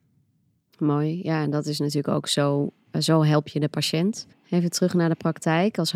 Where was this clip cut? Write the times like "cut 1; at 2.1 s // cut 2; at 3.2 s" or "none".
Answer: cut 1; at 4.3 s